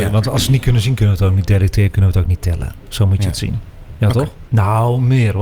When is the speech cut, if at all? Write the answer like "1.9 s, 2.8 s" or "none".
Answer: 4.5 s